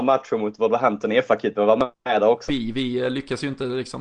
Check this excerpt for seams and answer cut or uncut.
cut